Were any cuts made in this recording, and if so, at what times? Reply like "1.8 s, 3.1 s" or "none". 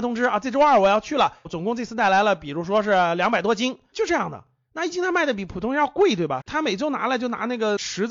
1.4 s, 6.4 s